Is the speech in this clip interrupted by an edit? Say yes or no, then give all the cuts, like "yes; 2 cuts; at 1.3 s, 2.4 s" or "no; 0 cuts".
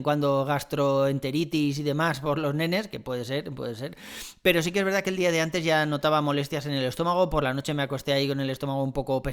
no; 0 cuts